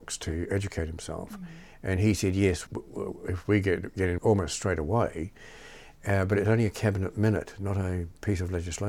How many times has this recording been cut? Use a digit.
2